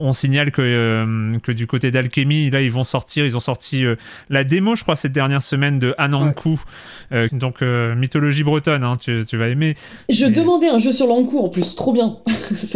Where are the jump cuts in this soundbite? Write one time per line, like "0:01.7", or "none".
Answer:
0:07.3